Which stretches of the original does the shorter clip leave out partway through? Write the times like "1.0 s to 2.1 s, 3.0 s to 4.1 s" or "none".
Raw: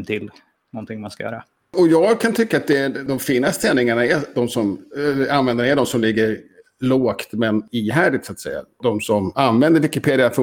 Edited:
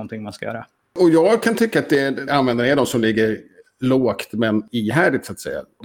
3.1 s to 5.3 s